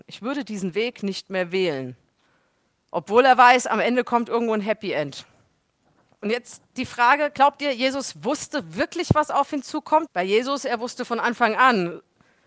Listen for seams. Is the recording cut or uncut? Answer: cut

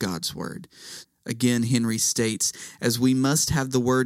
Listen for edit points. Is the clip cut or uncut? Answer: cut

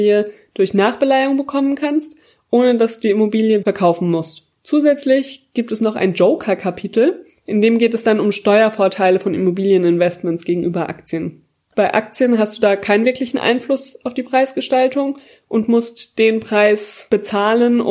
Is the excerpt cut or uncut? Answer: cut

